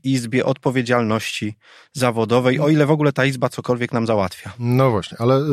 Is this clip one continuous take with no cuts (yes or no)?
yes